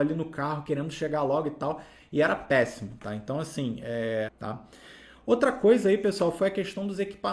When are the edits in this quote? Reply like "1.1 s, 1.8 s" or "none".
4.3 s